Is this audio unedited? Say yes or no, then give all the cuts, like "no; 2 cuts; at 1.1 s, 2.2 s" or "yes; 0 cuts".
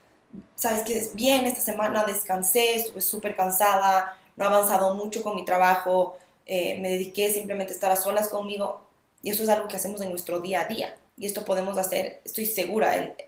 no; 2 cuts; at 9.2 s, 11.1 s